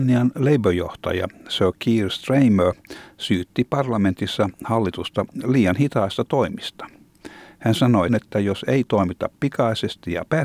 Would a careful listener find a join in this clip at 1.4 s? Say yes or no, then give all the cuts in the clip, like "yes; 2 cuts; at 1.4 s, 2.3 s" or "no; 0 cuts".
no; 1 cut; at 8.1 s